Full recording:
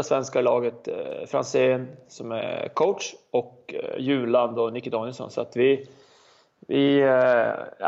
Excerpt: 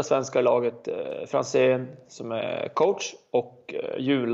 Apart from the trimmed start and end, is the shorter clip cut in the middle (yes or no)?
no